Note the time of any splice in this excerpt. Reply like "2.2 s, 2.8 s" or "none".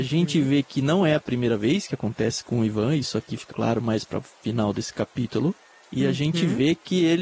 3.5 s